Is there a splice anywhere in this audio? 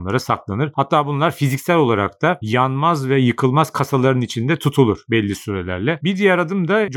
yes; 1 cut; at 6.0 s

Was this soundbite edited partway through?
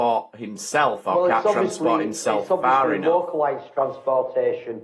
no; 0 cuts

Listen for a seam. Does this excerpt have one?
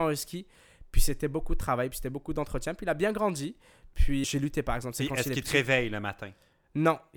yes; 1 cut; at 4.2 s

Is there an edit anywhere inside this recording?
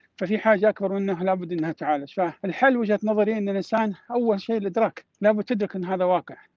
yes; 2 cuts; at 2.4 s, 5.1 s

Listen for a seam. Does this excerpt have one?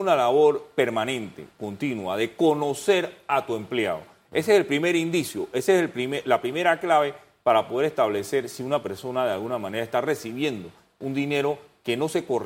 no; 0 cuts

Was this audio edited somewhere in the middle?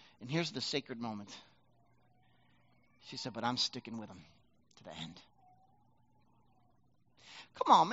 no; 0 cuts

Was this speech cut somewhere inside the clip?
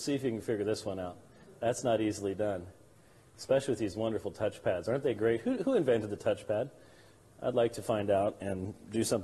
no; 0 cuts

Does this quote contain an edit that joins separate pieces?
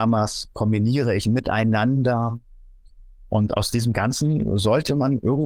no; 0 cuts

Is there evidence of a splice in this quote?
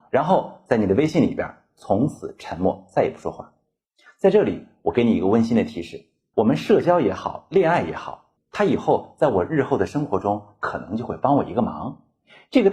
yes; 2 cuts; at 6.3 s, 8.4 s

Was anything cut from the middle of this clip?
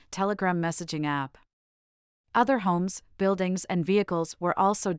no; 0 cuts

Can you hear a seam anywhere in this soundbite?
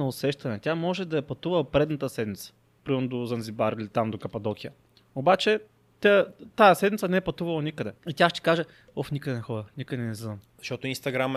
yes; 1 cut; at 8.0 s

